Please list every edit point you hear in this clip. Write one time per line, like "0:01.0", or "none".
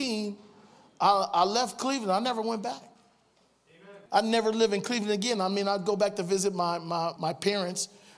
0:01.3
0:04.1
0:07.2

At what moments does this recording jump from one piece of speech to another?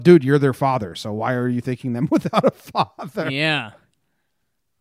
none

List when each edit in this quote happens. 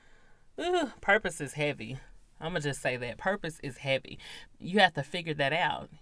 0:04.5

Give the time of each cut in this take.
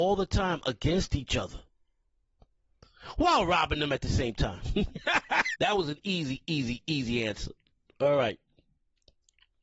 0:05.5

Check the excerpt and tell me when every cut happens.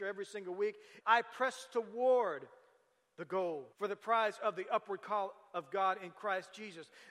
0:01.0
0:03.7

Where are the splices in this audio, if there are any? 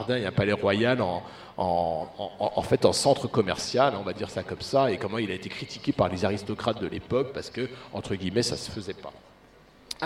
none

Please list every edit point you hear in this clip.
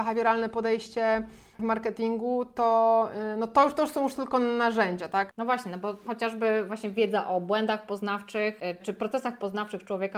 0:05.3
0:08.8

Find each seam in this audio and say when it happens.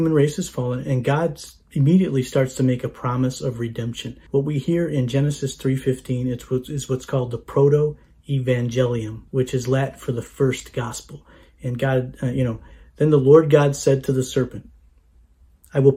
0:04.3
0:09.3

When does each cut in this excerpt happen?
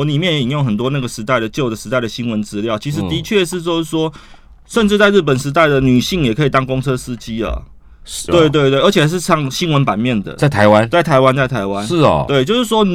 0:08.3

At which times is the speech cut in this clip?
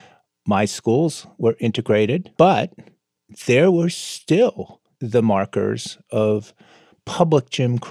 0:02.4
0:04.9

